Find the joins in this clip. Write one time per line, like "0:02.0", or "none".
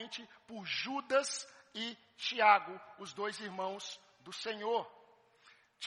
none